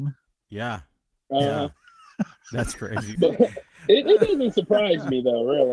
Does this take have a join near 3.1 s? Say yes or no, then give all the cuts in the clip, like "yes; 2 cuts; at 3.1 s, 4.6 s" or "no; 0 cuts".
yes; 1 cut; at 3.1 s